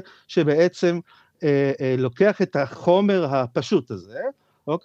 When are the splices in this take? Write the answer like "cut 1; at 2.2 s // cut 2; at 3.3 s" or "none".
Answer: none